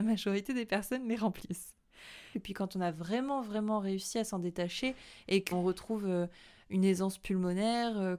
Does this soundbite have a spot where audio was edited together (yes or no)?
yes